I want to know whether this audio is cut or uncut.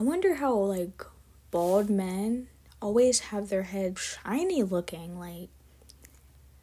cut